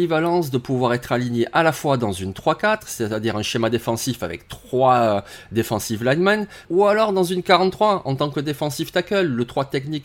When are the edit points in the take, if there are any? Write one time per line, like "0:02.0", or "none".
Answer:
0:06.6